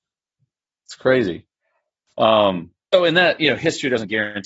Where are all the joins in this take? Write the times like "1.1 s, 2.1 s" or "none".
2.9 s